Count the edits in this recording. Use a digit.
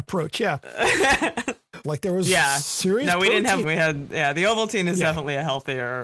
2